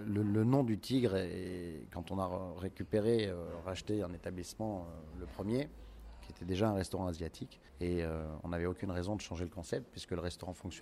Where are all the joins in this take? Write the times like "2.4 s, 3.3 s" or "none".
7.7 s